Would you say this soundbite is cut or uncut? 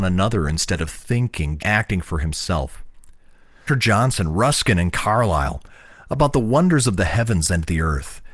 cut